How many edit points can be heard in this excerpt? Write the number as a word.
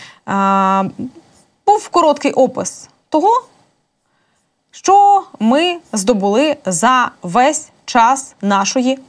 zero